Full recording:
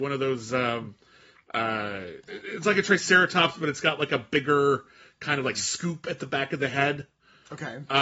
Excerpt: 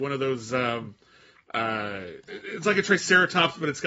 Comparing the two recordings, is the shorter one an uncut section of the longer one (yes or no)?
yes